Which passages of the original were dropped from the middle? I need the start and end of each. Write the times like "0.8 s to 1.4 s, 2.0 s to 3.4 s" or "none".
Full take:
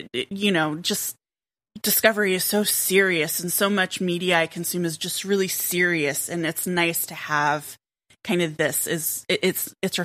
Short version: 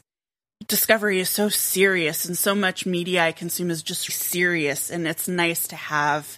5.2 s to 5.5 s